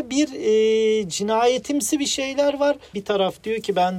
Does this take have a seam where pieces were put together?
yes; 1 cut; at 2.9 s

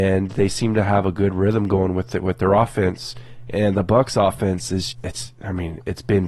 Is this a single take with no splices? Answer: no; 1 cut; at 4.9 s

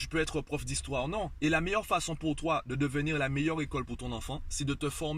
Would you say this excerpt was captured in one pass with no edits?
no; 1 cut; at 1.4 s

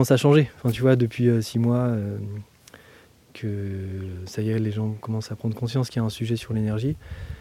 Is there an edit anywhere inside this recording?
no; 0 cuts

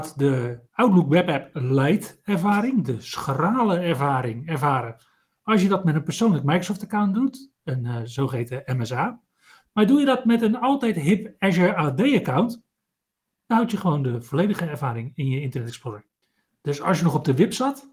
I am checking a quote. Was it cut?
no; 0 cuts

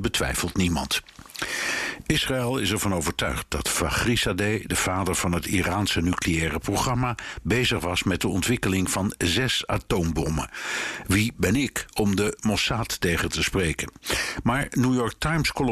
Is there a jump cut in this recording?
no; 0 cuts

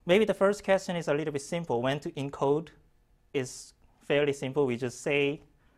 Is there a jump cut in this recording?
no; 0 cuts

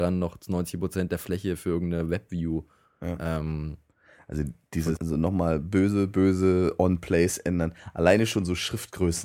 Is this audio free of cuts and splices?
no; 1 cut; at 5.0 s

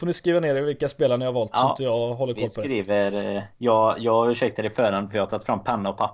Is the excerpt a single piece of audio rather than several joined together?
yes; 0 cuts

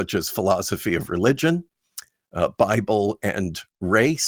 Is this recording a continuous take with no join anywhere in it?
no; 1 cut; at 2.2 s

